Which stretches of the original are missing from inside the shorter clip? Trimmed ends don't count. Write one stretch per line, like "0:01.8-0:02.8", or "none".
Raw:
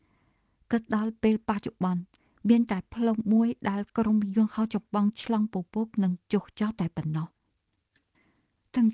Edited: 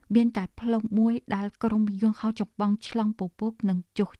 none